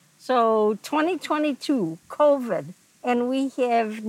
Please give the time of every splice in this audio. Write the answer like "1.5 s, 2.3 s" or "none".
none